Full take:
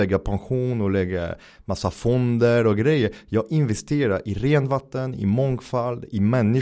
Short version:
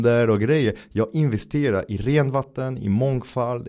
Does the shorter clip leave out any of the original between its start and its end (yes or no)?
no